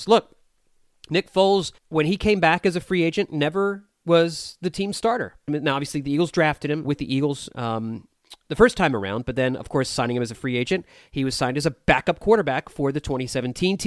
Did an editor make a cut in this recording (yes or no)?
yes